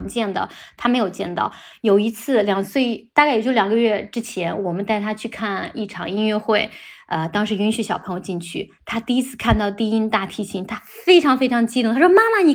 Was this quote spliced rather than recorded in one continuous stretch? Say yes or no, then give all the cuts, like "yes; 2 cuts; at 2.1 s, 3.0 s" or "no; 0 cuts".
no; 0 cuts